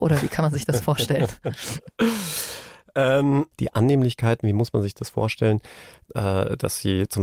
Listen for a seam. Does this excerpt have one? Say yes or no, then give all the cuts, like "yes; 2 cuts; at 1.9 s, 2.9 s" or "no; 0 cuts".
yes; 2 cuts; at 3.5 s, 6.0 s